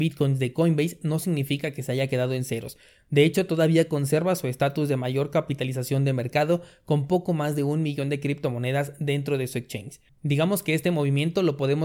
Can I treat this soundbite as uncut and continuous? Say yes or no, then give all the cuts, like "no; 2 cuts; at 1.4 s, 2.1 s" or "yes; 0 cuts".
no; 1 cut; at 10.1 s